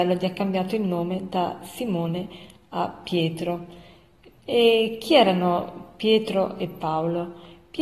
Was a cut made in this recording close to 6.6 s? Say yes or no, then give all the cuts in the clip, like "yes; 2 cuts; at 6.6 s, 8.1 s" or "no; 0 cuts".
no; 1 cut; at 4.4 s